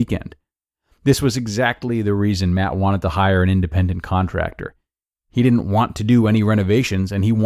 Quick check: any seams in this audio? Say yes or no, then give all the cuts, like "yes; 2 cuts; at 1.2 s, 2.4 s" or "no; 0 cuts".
no; 0 cuts